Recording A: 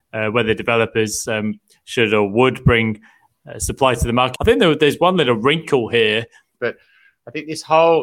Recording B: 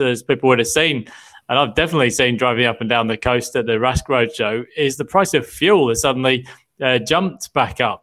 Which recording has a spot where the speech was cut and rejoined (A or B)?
A